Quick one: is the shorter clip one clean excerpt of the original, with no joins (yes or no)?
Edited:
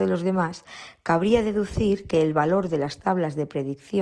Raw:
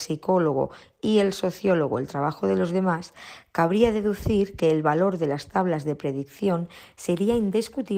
yes